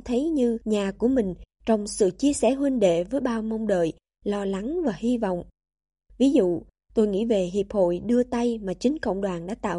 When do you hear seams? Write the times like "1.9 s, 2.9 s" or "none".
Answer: none